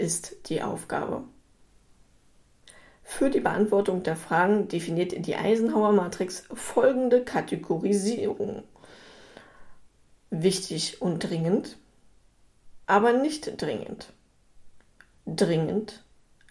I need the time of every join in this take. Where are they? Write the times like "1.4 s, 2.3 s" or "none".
12.8 s